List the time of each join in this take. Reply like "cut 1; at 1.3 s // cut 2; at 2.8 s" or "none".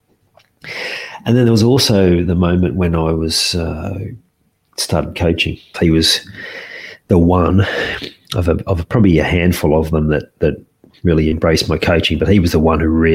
cut 1; at 5.7 s